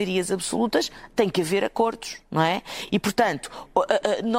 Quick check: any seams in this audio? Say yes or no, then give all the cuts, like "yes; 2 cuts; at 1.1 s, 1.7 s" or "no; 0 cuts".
no; 0 cuts